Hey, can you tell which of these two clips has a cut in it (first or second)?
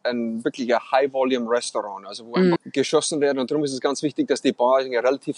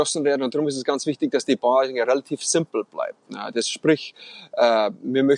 first